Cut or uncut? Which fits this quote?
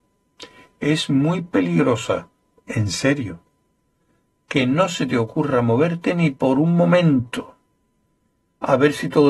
uncut